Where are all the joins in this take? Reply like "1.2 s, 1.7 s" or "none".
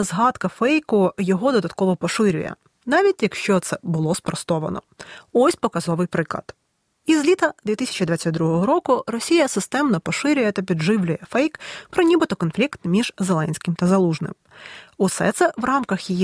none